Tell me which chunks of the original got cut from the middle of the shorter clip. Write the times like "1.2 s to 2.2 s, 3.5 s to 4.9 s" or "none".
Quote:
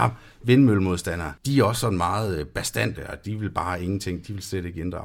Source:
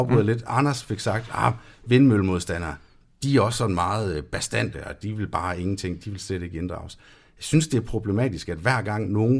2.8 s to 3.1 s

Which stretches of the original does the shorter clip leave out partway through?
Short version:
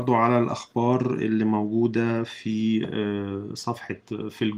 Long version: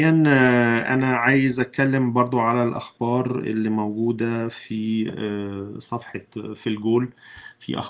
none

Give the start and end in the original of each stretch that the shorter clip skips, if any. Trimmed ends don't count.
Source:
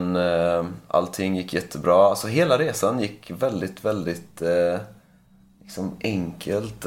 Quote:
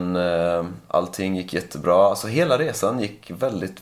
none

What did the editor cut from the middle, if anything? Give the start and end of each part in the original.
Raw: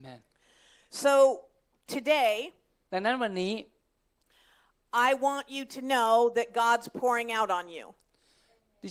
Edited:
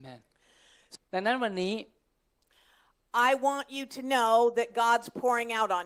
1.0 s to 2.7 s

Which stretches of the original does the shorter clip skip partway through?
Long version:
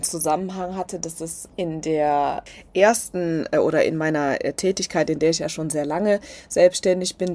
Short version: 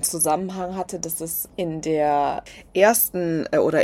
none

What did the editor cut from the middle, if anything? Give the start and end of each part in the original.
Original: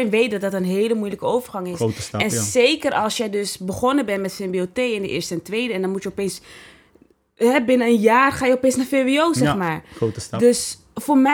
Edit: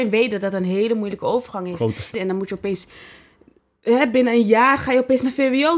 2.1 s to 5.7 s

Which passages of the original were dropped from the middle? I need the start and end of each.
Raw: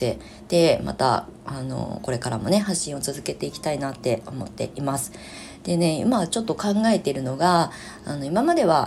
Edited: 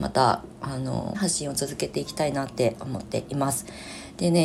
2.0 s to 2.6 s

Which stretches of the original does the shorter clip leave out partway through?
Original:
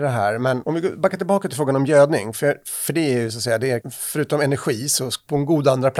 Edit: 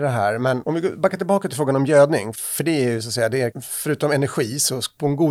2.3 s to 2.6 s

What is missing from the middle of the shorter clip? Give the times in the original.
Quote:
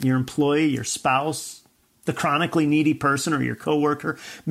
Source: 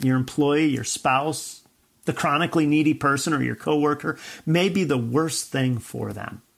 none

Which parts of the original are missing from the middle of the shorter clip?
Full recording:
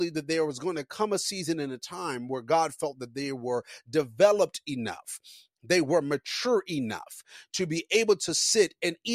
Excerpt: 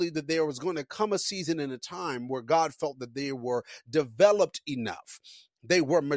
none

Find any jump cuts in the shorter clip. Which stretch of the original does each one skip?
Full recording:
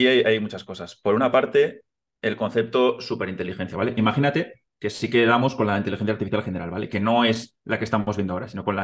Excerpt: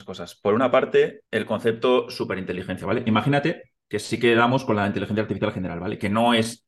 1.9 s to 2.2 s

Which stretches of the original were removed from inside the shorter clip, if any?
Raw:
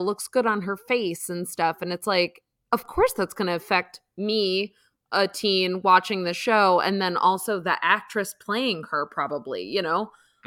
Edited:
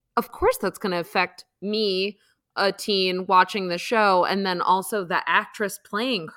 none

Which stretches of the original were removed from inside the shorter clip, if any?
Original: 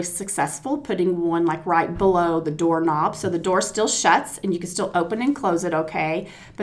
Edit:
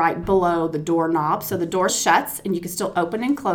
3.6 s to 3.9 s

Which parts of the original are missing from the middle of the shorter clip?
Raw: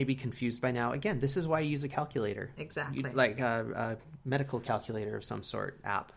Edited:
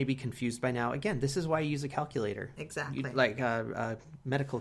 none

